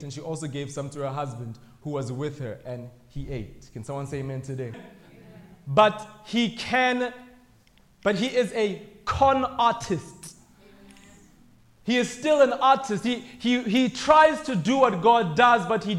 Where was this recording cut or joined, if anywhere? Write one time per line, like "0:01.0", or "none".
0:04.7